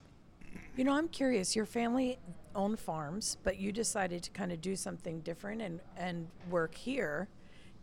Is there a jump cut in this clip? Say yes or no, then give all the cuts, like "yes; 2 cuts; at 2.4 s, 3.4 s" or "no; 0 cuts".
no; 0 cuts